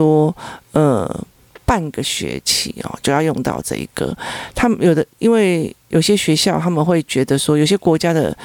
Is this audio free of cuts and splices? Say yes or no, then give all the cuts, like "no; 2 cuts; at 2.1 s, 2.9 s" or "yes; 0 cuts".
yes; 0 cuts